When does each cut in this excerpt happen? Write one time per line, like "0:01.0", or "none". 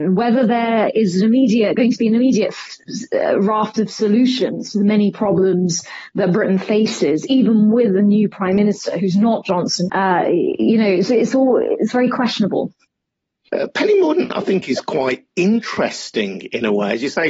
0:09.9